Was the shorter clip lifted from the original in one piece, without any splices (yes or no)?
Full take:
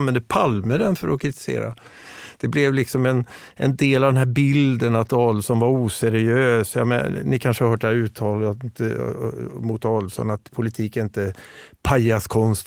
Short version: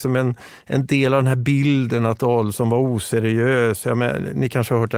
yes